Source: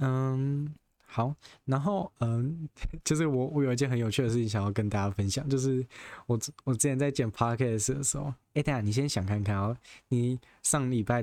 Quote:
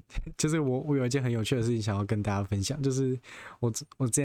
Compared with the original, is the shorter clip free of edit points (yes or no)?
yes